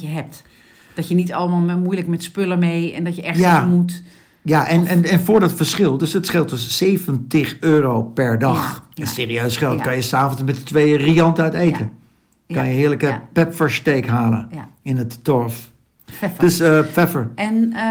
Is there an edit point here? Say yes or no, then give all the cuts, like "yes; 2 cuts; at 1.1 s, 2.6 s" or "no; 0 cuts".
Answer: no; 0 cuts